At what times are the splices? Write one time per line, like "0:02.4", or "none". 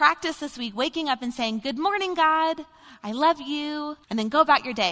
0:04.0